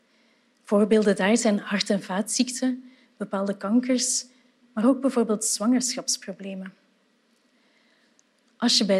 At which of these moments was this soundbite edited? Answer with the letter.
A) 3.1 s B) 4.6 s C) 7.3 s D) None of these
B